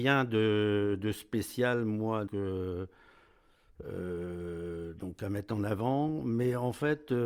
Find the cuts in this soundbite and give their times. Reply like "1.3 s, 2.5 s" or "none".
2.3 s